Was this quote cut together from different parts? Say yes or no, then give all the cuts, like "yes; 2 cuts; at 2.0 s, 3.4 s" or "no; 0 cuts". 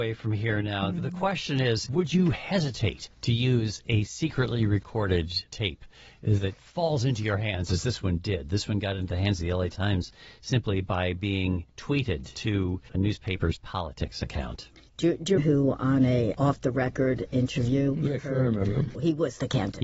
yes; 2 cuts; at 15.4 s, 18.9 s